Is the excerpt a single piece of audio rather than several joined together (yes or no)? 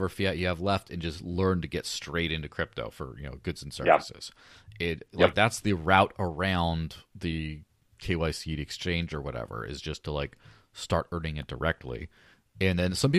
yes